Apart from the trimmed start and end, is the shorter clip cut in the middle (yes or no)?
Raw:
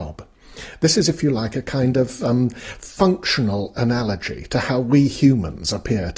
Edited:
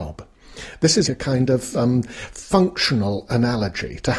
yes